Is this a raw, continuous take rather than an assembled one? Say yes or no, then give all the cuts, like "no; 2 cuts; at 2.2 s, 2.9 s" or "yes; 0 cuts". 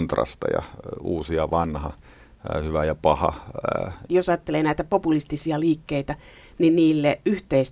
no; 1 cut; at 4.1 s